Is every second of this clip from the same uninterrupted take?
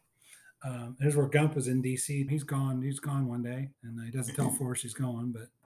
no; 2 cuts; at 2.3 s, 3.7 s

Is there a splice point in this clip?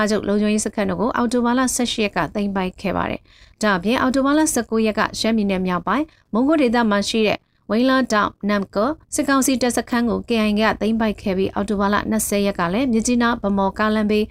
yes; 1 cut; at 9.0 s

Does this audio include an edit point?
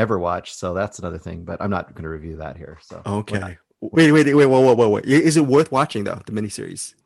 yes; 1 cut; at 3.9 s

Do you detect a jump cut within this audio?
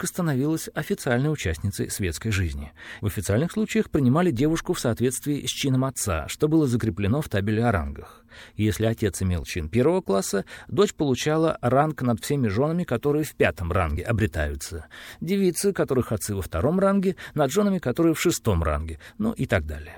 yes; 1 cut; at 3.0 s

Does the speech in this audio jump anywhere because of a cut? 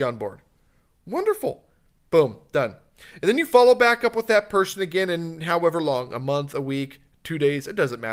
no; 0 cuts

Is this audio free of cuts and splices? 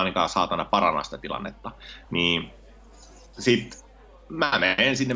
yes; 0 cuts

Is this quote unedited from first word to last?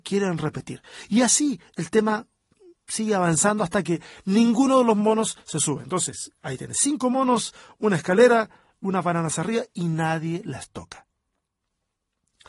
yes; 0 cuts

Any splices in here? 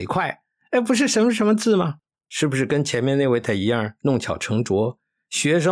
yes; 2 cuts; at 2.2 s, 3.4 s

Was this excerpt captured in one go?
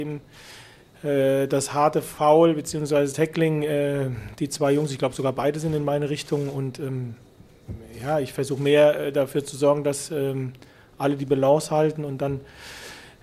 yes; 0 cuts

